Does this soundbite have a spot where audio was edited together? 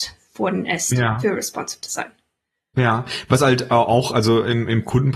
no; 0 cuts

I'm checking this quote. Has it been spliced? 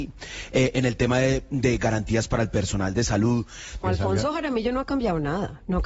yes; 1 cut; at 3.8 s

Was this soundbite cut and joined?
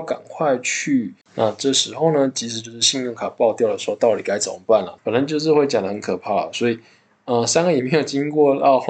yes; 2 cuts; at 1.2 s, 5.0 s

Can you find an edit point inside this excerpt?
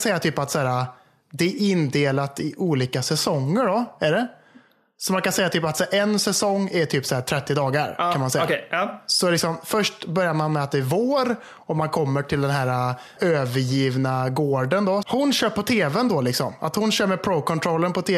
yes; 2 cuts; at 13.2 s, 15.0 s

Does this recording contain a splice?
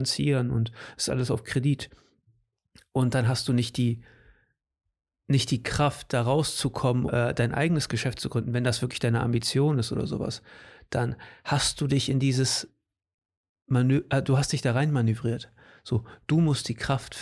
yes; 1 cut; at 7.1 s

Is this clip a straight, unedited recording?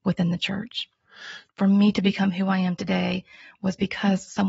no; 1 cut; at 1.5 s

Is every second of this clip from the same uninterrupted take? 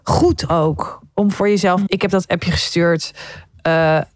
no; 1 cut; at 1.9 s

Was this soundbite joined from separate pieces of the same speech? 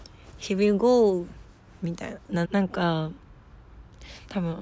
yes; 1 cut; at 2.4 s

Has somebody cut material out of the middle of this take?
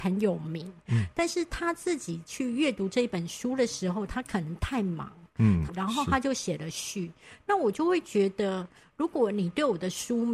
yes; 1 cut; at 5.7 s

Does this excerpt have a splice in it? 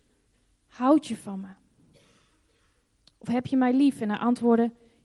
no; 0 cuts

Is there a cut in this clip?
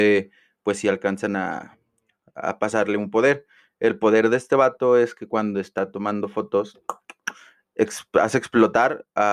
no; 0 cuts

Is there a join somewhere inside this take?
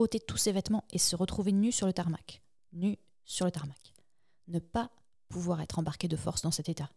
no; 0 cuts

